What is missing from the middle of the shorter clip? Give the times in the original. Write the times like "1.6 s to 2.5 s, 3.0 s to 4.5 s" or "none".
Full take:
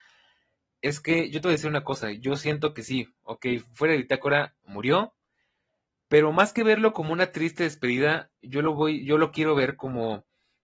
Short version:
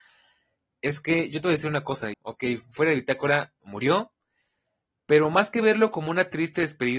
2.1 s to 3.2 s

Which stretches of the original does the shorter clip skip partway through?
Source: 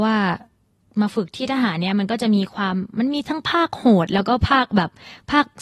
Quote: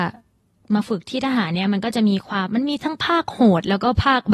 2.7 s to 2.9 s

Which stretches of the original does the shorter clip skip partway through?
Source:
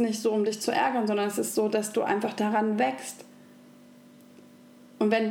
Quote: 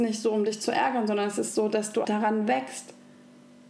2.0 s to 2.4 s

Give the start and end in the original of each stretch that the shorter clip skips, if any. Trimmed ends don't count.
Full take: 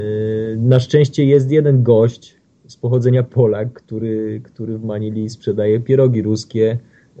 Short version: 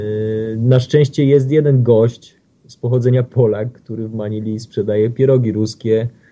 3.7 s to 4.4 s

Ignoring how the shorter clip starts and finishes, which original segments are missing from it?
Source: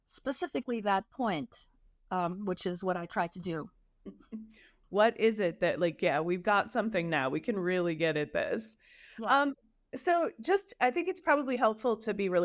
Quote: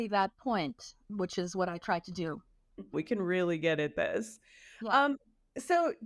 1.8 s to 2.4 s, 4.2 s to 7.3 s

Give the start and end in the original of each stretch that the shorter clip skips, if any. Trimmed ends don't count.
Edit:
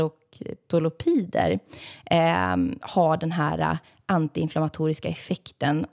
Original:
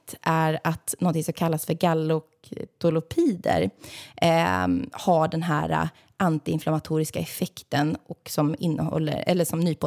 none

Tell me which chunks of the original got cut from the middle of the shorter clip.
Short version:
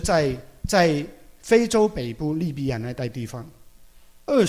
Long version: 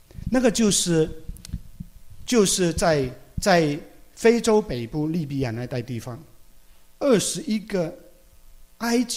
none

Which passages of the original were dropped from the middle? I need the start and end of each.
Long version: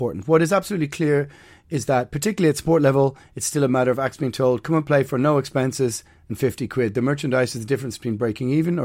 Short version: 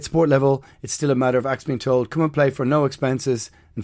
none

